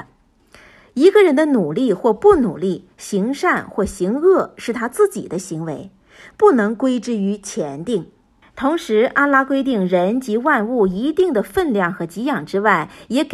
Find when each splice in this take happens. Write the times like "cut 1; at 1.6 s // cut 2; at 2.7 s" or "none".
cut 1; at 8.4 s